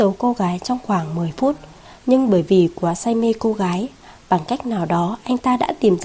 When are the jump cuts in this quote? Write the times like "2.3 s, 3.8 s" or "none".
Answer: none